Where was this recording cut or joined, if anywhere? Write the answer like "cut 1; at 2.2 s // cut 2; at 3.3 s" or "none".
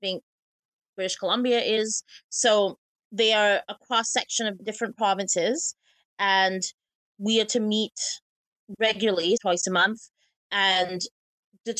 cut 1; at 4.6 s // cut 2; at 9.4 s